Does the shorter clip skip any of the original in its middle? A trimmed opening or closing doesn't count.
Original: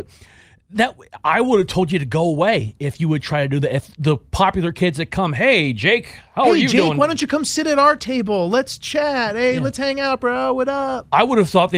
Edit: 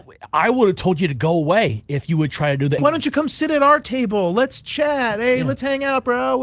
yes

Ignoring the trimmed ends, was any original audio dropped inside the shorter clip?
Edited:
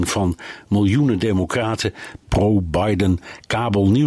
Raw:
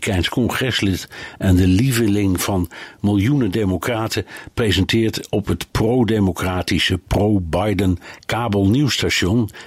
yes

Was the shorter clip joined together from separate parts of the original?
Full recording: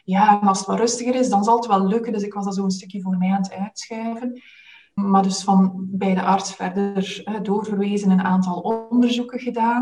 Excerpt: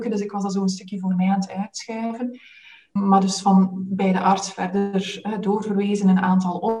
no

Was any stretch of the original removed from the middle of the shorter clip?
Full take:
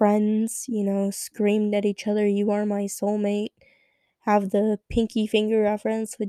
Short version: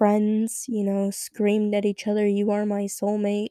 no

